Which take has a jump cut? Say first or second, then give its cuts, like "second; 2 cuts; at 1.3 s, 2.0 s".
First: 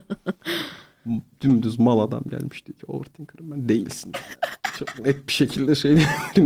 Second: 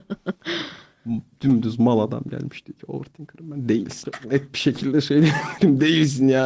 second; 1 cut; at 4.0 s